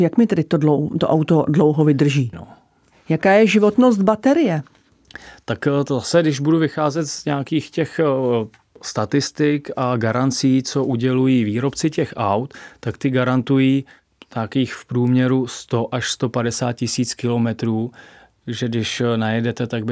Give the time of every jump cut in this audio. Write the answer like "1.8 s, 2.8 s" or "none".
2.3 s